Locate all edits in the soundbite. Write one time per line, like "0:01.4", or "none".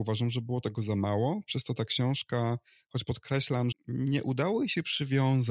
0:03.7